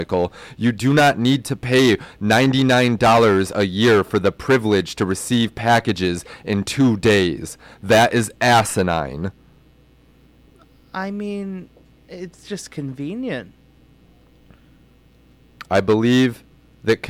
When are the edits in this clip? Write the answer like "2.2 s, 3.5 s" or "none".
none